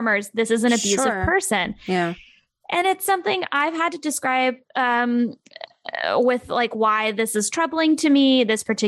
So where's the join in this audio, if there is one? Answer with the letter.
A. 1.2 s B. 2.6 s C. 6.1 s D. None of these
D